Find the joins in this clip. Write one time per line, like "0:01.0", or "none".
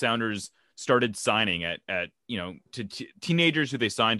0:02.7

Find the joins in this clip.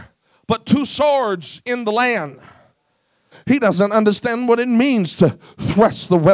0:03.3

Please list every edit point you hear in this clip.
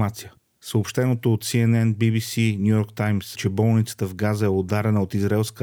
0:03.3

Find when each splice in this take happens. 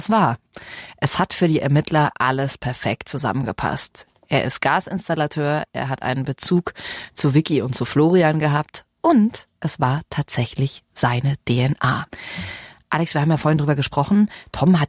none

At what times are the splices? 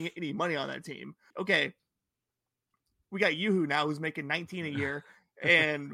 0:01.3

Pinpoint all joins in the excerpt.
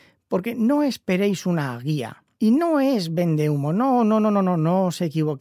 0:02.3

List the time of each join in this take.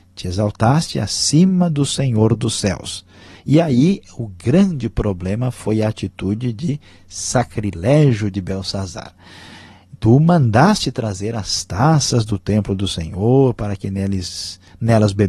none

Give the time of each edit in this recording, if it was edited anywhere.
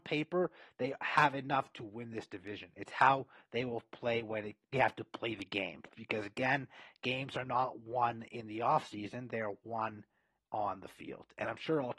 0:04.7

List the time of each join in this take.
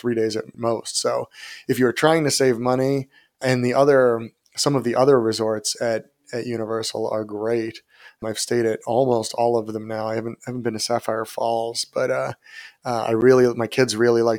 none

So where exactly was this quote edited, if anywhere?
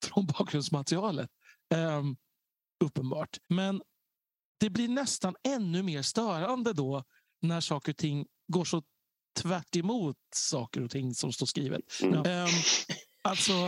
0:03.4
0:12.2

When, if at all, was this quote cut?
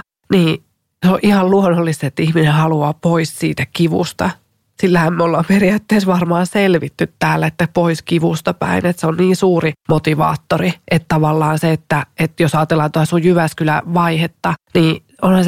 none

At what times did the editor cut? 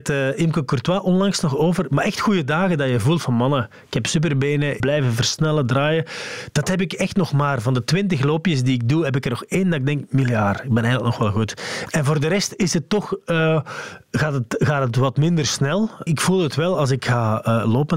0:04.8
0:16.1

